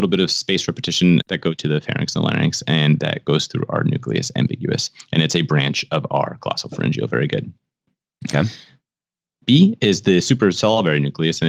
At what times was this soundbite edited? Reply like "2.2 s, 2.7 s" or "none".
1.2 s